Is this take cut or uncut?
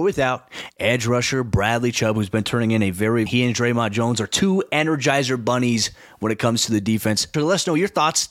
cut